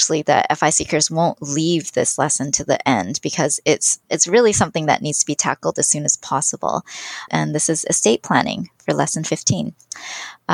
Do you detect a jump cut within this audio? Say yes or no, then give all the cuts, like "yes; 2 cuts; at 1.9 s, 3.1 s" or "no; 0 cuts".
yes; 1 cut; at 7.3 s